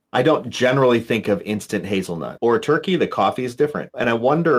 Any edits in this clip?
yes; 1 cut; at 2.4 s

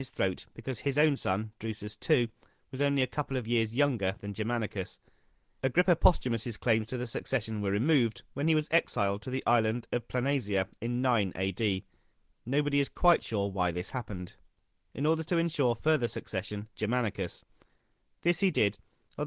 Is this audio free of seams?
no; 3 cuts; at 5.6 s, 14.9 s, 16.7 s

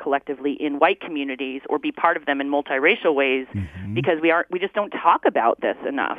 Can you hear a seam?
no; 0 cuts

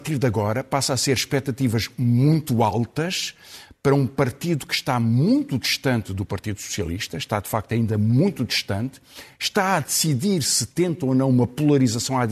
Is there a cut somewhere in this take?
no; 0 cuts

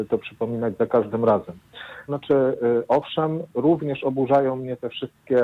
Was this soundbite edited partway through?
yes; 1 cut; at 2.1 s

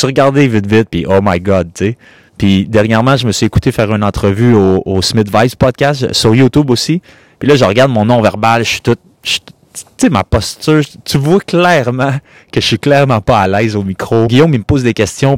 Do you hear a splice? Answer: yes; 1 cut; at 14.3 s

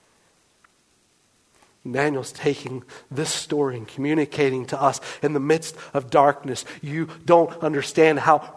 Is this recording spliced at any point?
no; 0 cuts

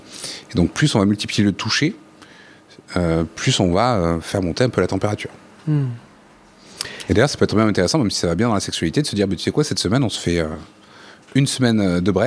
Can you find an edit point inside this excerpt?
no; 0 cuts

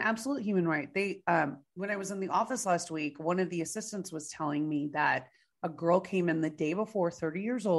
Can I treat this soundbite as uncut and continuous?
yes; 0 cuts

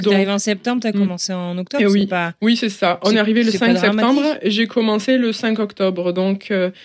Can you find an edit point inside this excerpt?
no; 0 cuts

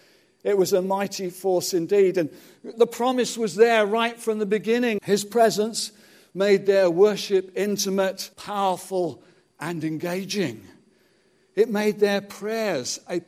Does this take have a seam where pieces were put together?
yes; 3 cuts; at 2.7 s, 5.0 s, 8.3 s

